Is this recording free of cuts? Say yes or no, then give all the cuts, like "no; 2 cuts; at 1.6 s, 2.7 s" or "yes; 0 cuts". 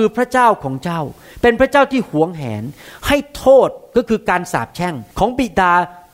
no; 1 cut; at 5.1 s